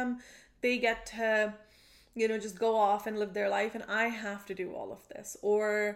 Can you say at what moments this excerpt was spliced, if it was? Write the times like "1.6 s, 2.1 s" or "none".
none

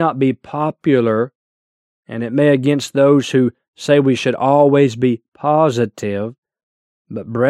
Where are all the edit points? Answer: none

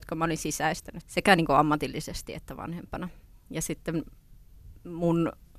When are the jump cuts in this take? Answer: 1.0 s

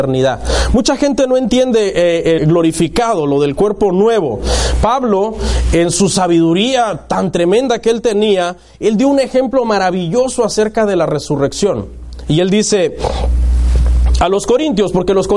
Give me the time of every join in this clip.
2.4 s

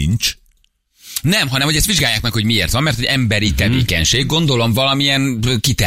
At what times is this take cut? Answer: none

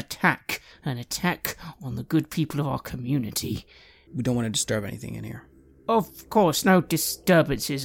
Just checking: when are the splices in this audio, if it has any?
4.1 s

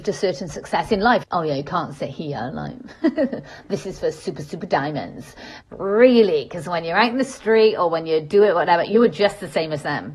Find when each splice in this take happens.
1.2 s, 5.6 s

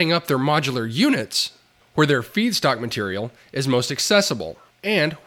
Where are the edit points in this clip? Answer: none

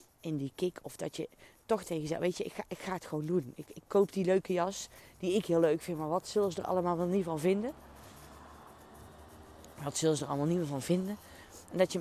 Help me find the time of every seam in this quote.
none

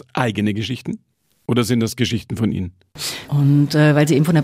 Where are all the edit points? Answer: 3.3 s

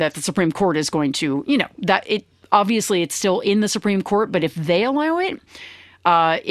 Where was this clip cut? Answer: none

